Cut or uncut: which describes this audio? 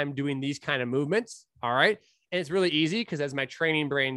uncut